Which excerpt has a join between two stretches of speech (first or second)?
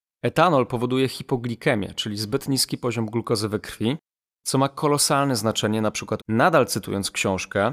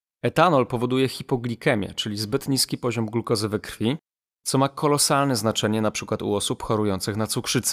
first